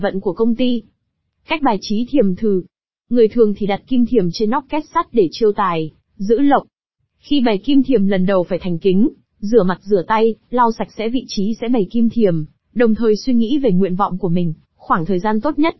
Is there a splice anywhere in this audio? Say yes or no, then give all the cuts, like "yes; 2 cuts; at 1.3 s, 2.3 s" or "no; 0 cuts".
yes; 2 cuts; at 7.0 s, 14.6 s